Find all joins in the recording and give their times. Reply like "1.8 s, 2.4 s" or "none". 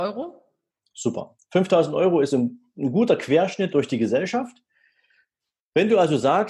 none